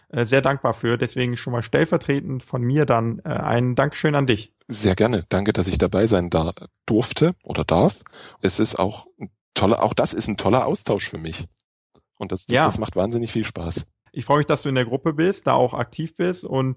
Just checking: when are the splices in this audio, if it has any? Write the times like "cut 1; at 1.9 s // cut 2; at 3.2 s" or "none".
cut 1; at 8.4 s // cut 2; at 14.1 s